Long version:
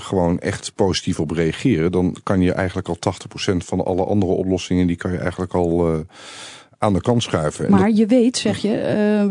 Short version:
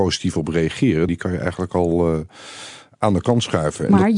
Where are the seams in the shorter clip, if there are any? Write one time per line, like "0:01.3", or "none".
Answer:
0:01.1